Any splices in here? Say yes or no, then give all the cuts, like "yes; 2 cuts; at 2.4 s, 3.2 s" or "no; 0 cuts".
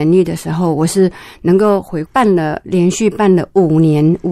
yes; 1 cut; at 2.1 s